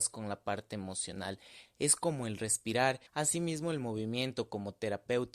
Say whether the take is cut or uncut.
cut